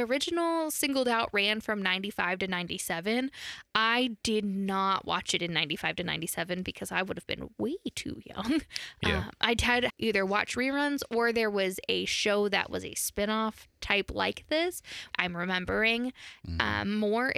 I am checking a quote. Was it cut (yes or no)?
yes